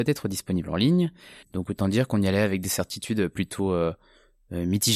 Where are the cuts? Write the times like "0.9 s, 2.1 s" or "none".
1.4 s